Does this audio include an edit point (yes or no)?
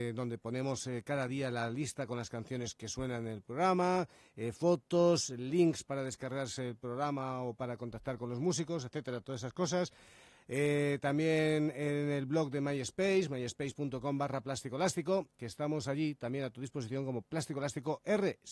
yes